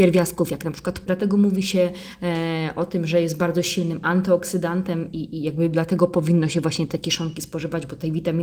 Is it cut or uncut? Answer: cut